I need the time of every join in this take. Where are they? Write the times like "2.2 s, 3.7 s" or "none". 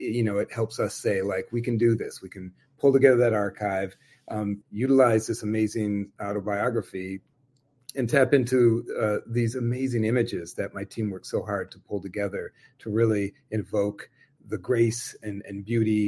4.6 s